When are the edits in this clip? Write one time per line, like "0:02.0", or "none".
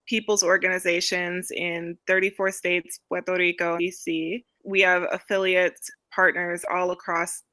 0:03.8